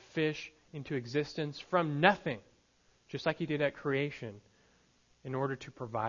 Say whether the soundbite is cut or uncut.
uncut